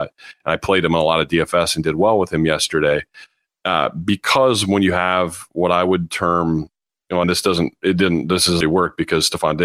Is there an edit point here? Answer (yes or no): yes